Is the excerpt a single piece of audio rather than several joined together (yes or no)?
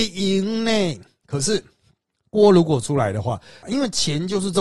no